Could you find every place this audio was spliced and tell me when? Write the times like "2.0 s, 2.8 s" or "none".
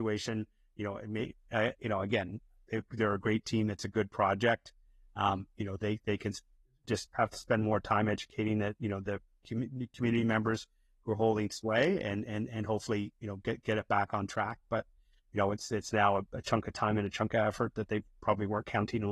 none